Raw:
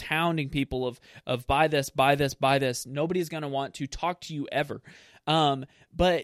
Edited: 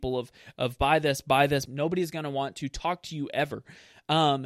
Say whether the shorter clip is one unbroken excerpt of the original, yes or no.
no